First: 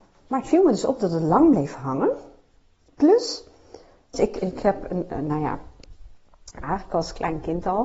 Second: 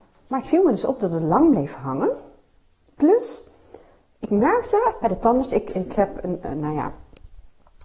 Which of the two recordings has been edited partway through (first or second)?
first